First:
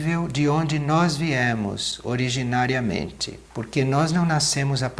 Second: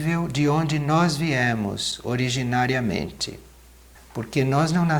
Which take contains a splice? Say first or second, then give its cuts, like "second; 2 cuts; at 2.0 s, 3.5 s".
first; 1 cut; at 3.4 s